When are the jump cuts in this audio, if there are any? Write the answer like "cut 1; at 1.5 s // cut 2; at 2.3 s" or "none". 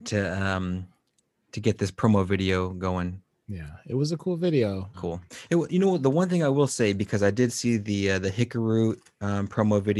cut 1; at 4.9 s